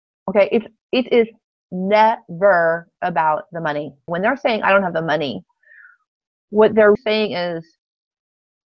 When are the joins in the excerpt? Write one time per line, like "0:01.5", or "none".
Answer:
0:04.1
0:07.0